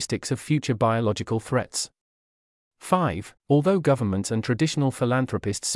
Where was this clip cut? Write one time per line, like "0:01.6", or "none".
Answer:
0:03.4